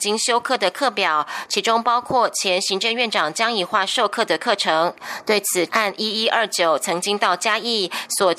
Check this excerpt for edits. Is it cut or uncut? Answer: cut